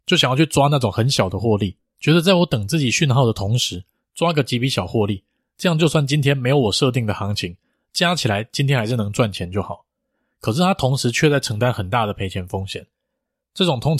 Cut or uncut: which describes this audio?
uncut